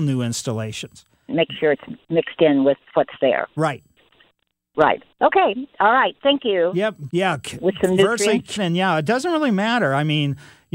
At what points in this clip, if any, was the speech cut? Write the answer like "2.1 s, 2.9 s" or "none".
1.3 s, 7.1 s, 8.6 s